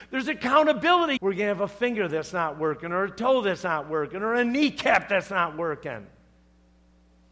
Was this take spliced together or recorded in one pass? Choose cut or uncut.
cut